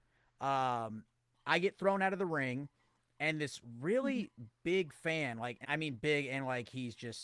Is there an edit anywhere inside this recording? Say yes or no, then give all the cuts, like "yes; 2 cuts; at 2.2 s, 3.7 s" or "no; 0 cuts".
yes; 1 cut; at 5.6 s